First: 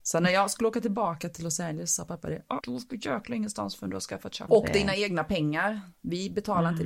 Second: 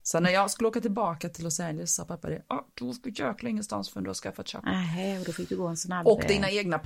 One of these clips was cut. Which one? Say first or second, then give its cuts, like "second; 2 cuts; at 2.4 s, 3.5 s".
first; 2 cuts; at 2.6 s, 4.5 s